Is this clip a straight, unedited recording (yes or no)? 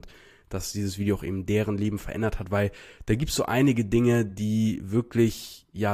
yes